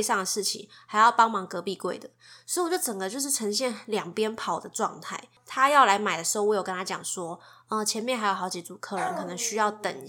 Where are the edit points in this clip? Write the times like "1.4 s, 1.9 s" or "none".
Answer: none